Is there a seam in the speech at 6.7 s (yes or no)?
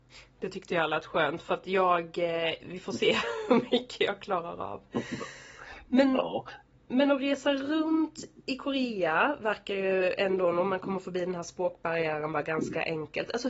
no